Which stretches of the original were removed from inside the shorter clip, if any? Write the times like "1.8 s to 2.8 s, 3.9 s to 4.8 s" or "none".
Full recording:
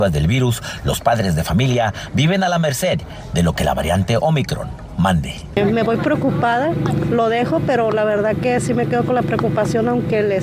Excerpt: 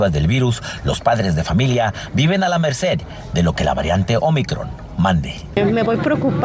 none